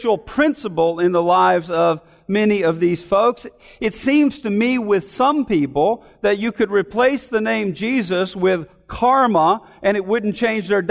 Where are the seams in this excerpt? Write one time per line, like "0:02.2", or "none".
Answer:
none